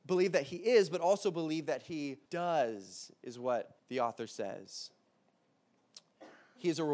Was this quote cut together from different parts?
yes; 2 cuts; at 2.3 s, 3.8 s

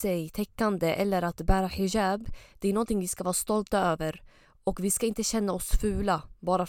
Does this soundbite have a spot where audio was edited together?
no; 0 cuts

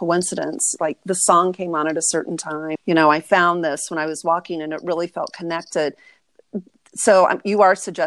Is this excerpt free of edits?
no; 1 cut; at 2.8 s

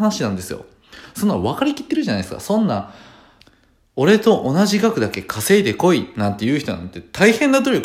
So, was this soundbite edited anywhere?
no; 0 cuts

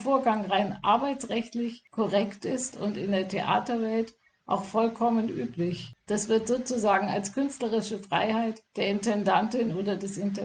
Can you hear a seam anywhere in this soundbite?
no; 0 cuts

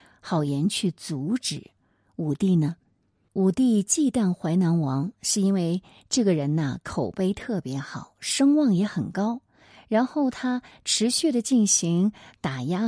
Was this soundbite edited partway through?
yes; 1 cut; at 3.3 s

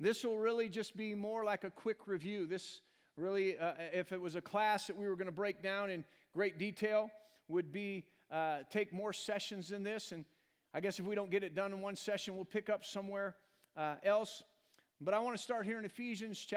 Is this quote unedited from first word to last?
yes; 0 cuts

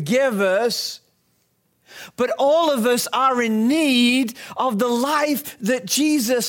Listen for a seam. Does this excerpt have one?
no; 0 cuts

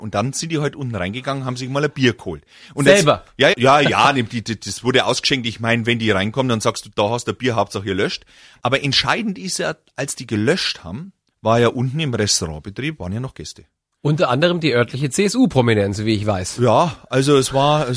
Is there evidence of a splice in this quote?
yes; 1 cut; at 3.5 s

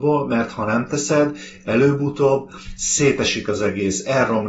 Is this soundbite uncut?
yes; 0 cuts

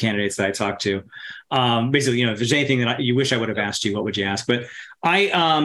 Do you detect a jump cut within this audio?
no; 0 cuts

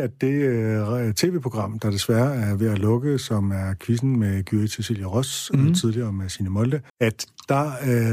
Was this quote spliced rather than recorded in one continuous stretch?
yes; 1 cut; at 6.9 s

